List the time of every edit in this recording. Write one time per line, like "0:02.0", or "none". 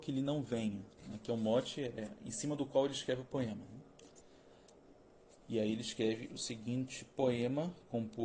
none